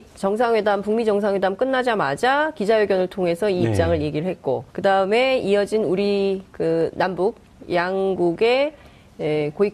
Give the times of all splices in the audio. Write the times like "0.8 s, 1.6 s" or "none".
4.7 s